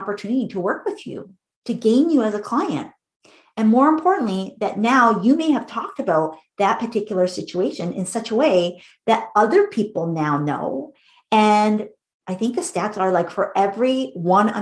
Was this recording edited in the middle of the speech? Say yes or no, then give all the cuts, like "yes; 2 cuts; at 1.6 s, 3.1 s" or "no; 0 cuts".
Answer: no; 0 cuts